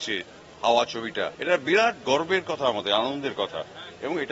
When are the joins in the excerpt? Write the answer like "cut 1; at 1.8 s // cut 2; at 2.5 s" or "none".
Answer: cut 1; at 1.3 s